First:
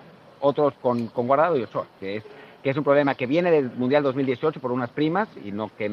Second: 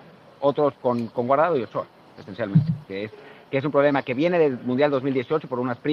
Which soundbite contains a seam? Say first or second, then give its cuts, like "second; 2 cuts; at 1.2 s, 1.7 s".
first; 1 cut; at 2.0 s